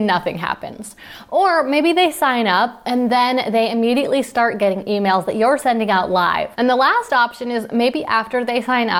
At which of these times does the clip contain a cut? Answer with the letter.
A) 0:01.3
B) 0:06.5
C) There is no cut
B